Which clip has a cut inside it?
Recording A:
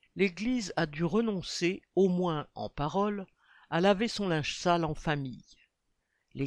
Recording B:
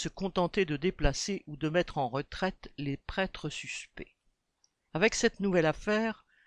B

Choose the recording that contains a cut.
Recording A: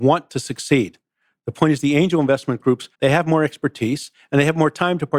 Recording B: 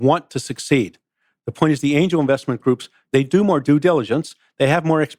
A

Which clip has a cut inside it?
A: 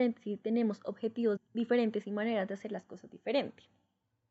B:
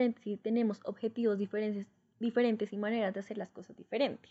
A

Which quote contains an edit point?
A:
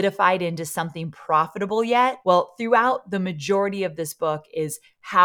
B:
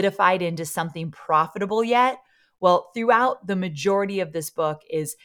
A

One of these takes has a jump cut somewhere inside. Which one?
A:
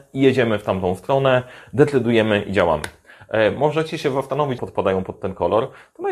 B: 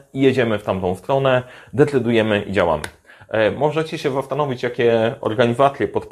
A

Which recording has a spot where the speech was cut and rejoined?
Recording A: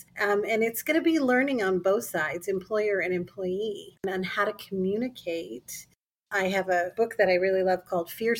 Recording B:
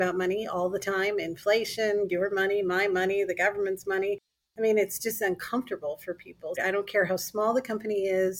B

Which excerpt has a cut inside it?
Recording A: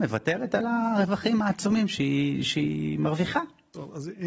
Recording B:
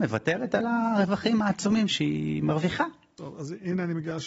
B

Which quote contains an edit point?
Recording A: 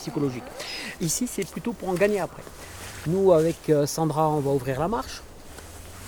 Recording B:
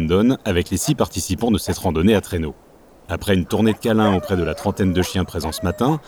A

